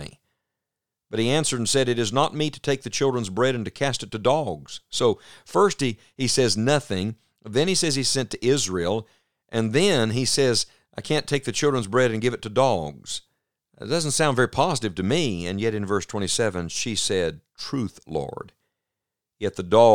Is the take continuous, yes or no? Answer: yes